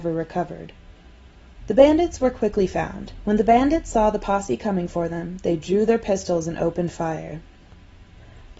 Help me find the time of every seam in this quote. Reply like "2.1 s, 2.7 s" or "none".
1.6 s, 3.2 s